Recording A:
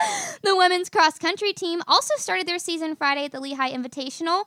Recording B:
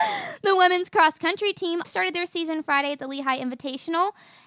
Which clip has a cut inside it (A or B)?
B